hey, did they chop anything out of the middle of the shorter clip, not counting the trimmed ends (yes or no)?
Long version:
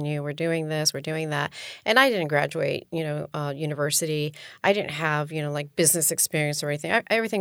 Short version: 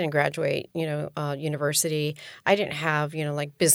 no